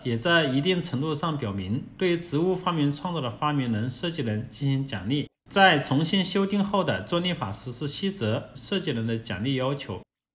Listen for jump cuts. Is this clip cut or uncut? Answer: cut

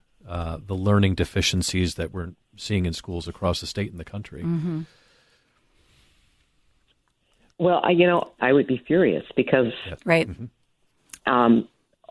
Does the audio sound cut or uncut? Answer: cut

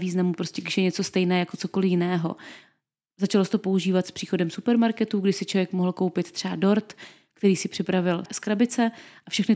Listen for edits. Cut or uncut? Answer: uncut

